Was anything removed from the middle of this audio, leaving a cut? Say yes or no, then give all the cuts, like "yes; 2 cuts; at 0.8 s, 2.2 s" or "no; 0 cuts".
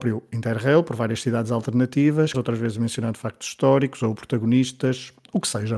yes; 1 cut; at 2.3 s